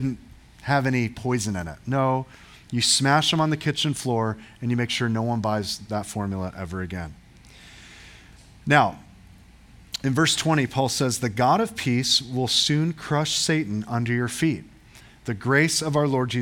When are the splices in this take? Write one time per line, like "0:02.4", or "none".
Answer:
none

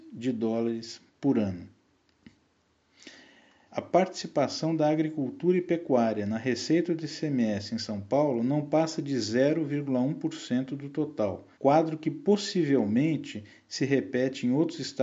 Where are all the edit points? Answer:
0:03.7
0:11.5

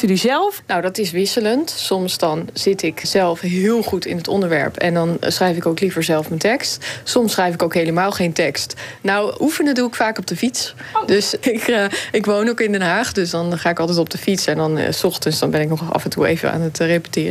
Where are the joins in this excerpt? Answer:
0:03.0
0:09.0
0:11.4

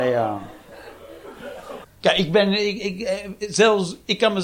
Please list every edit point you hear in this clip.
0:01.8

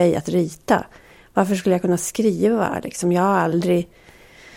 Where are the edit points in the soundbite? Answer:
none

